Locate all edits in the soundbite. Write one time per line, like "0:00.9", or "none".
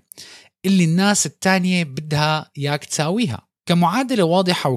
0:03.6